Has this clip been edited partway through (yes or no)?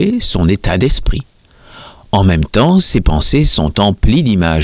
no